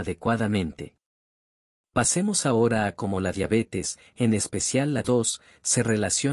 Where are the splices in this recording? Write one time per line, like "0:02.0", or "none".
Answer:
0:05.0